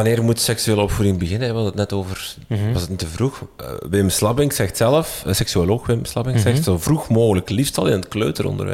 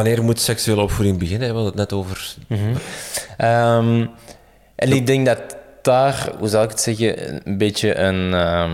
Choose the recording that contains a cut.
second; 1 cut; at 2.8 s

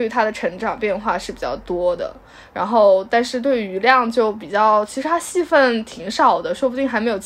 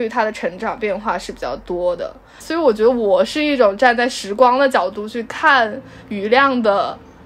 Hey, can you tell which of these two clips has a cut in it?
second; 1 cut; at 2.4 s

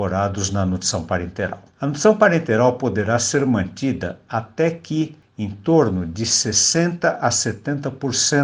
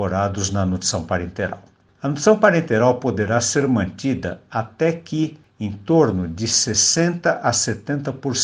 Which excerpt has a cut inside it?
first; 1 cut; at 1.7 s

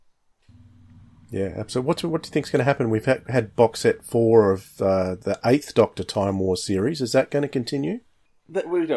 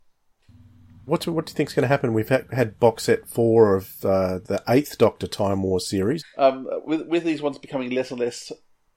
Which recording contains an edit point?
second; 2 cuts; at 1.1 s, 6.2 s

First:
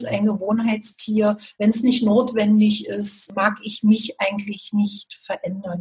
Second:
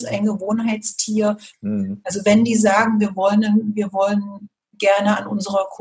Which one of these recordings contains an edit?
second; 1 cut; at 1.5 s

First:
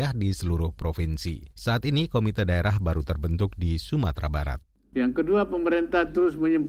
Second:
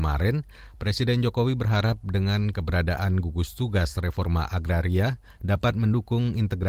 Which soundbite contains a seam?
first; 1 cut; at 1.5 s

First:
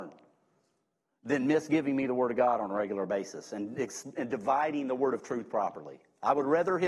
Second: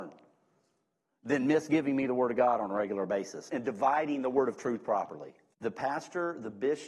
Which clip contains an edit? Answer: second; 2 cuts; at 3.5 s, 5.5 s

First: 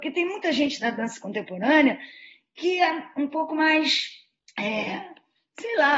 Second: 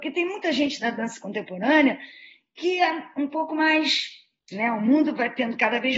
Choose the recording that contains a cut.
second; 1 cut; at 4.5 s

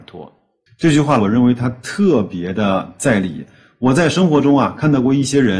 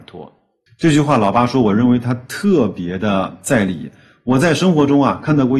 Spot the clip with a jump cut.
first; 1 cut; at 1.2 s

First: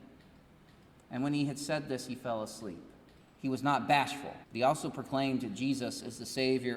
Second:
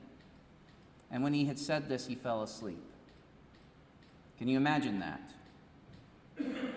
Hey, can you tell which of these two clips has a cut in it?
first; 2 cuts; at 3.2 s, 4.4 s

